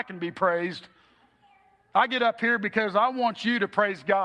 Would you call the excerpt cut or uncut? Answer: uncut